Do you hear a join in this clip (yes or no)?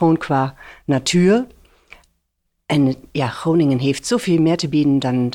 no